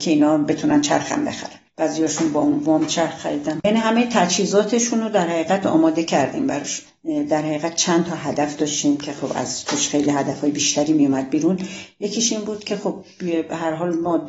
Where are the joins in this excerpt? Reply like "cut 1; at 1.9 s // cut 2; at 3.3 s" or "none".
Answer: cut 1; at 1.7 s